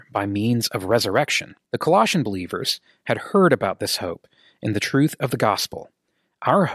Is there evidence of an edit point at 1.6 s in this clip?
yes; 1 cut; at 1.6 s

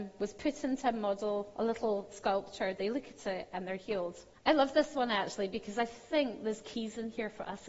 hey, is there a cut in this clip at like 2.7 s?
no; 1 cut; at 4.3 s

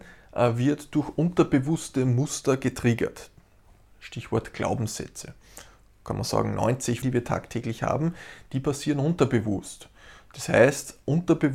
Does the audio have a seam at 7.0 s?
yes; 1 cut; at 7.0 s

